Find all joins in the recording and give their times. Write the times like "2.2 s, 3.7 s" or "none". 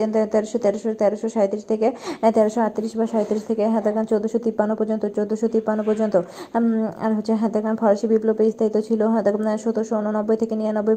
none

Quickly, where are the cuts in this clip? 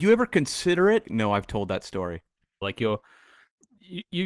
1.0 s, 2.6 s

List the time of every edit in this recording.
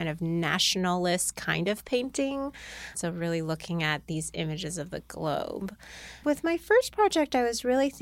2.9 s, 6.2 s

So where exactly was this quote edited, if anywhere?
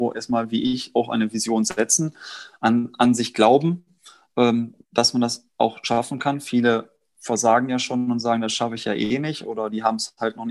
none

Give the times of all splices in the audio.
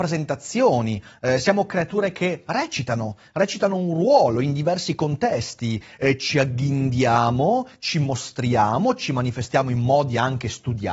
none

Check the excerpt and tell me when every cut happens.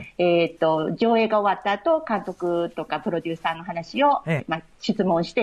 4.4 s

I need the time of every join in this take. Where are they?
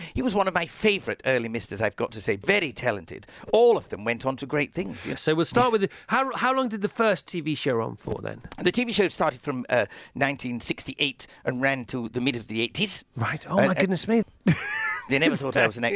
5.1 s, 14.2 s

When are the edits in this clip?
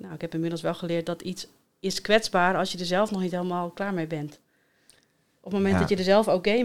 none

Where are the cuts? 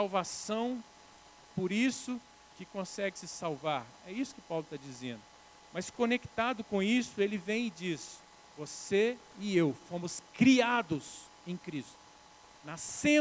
1.5 s

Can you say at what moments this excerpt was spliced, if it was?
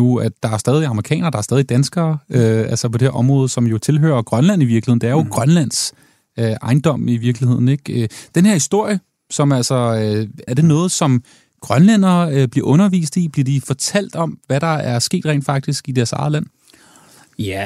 10.5 s

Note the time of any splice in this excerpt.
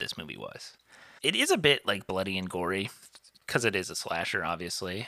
1.2 s

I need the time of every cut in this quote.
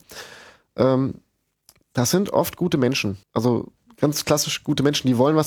3.2 s

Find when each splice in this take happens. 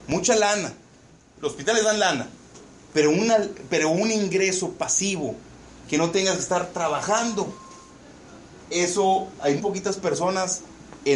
2.9 s, 9.6 s

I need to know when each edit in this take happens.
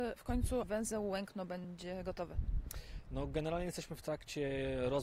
none

